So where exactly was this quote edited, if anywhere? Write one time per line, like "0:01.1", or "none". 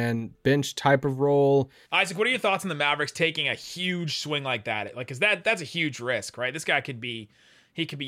0:01.8